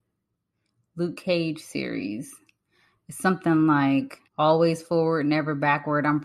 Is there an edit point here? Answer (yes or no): yes